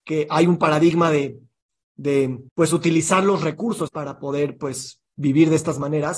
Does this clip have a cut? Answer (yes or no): yes